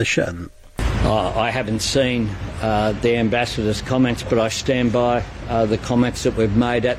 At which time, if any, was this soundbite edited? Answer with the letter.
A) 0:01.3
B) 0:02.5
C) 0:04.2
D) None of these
D